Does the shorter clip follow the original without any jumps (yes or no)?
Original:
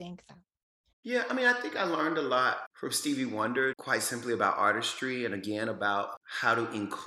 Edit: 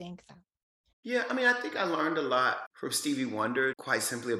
yes